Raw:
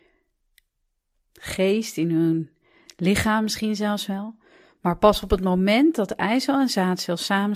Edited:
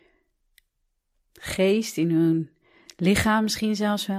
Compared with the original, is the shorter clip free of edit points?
yes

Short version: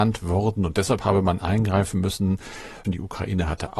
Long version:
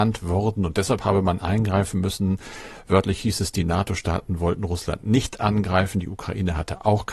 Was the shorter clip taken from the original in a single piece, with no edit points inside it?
no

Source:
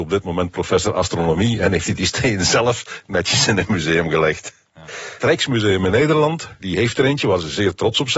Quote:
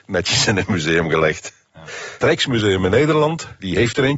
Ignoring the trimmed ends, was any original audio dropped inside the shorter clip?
no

